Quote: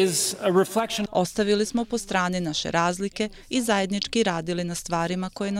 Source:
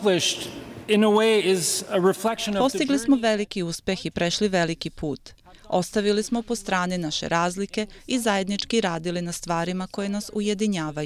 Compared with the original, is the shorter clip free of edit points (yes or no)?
no